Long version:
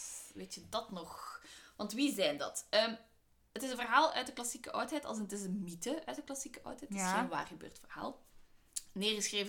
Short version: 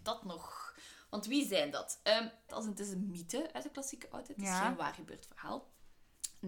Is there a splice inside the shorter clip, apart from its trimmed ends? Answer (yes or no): yes